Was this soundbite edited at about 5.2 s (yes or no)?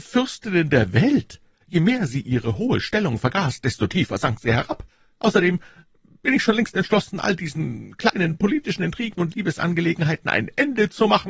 no